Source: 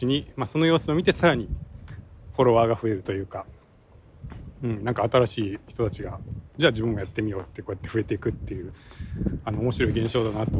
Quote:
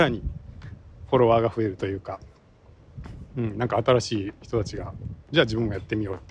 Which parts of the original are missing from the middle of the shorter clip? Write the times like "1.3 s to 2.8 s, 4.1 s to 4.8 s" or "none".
none